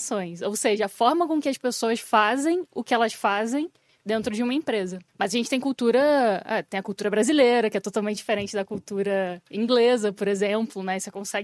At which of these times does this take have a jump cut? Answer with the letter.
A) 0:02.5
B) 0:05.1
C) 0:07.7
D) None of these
B